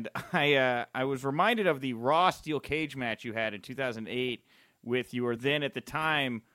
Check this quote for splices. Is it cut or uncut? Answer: uncut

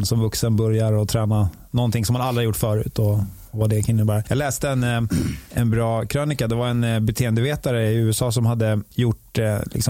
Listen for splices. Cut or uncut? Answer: uncut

